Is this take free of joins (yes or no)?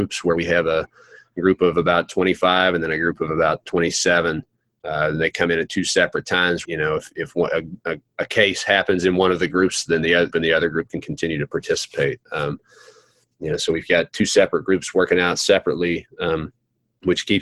no